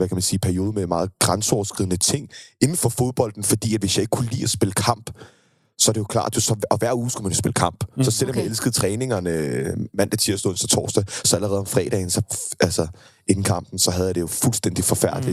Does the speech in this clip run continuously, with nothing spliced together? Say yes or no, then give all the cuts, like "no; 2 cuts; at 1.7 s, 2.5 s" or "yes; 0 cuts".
yes; 0 cuts